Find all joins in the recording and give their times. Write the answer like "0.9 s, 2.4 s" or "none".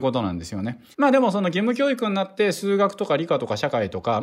0.9 s